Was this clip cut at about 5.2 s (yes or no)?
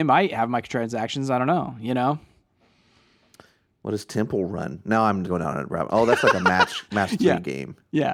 yes